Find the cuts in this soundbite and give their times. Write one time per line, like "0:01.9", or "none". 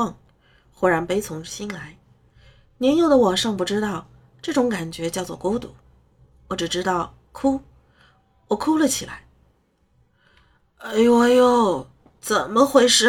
none